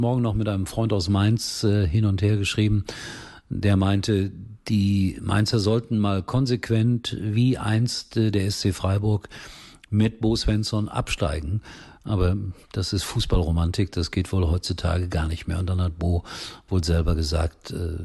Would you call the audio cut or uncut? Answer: uncut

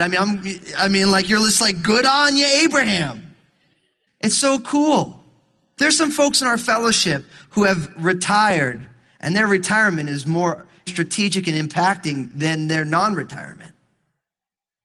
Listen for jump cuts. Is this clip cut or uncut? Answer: cut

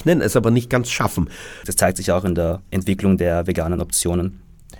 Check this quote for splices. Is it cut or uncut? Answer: cut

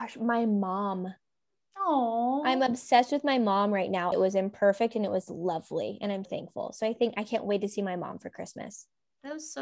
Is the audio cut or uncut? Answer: cut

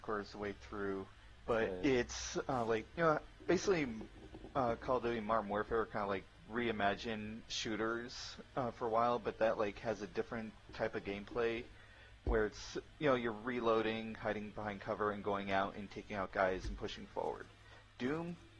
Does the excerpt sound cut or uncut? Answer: uncut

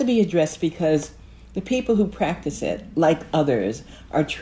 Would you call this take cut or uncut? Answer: uncut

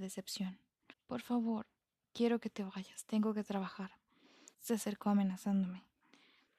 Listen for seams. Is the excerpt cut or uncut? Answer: cut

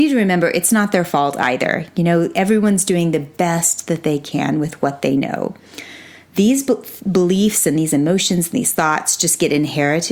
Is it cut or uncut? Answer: uncut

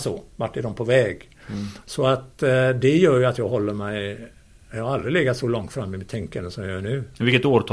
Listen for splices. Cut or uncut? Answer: cut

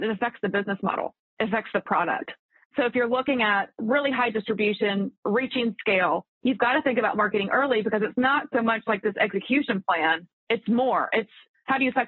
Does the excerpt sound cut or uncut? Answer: uncut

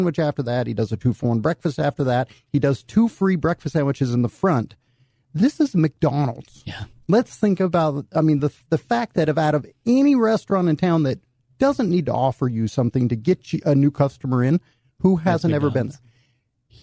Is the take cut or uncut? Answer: uncut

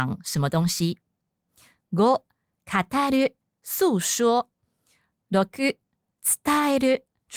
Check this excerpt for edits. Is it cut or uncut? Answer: uncut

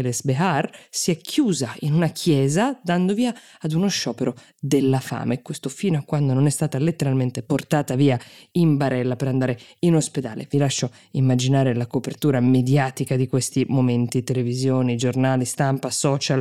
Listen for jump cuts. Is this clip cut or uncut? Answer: uncut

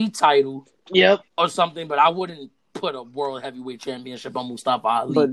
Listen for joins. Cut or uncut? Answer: cut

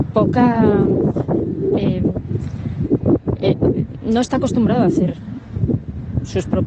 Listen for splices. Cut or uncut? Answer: uncut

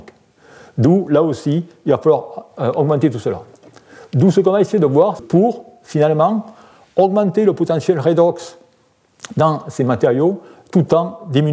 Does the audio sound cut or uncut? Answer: cut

